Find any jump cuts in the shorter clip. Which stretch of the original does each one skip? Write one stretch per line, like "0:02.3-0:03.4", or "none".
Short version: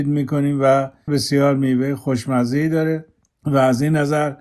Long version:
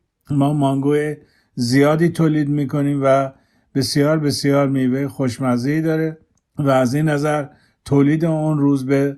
0:03.5-0:04.2